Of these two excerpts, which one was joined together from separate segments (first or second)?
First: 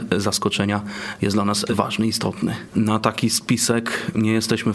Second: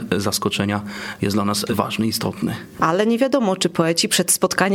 first